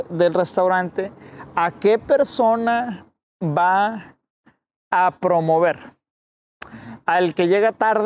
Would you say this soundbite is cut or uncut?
uncut